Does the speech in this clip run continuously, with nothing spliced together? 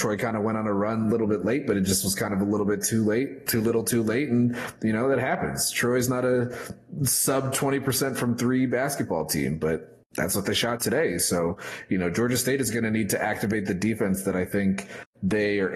yes; 0 cuts

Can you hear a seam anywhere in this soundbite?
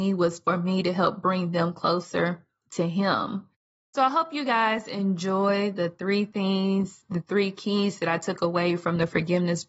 no; 0 cuts

